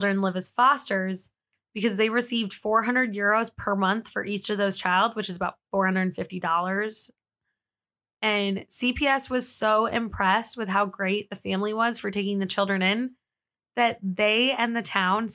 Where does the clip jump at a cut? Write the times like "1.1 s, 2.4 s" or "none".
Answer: none